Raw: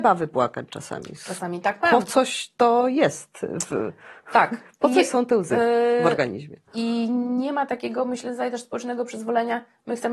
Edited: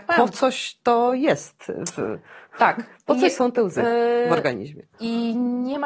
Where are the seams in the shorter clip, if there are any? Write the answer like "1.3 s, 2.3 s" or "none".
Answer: none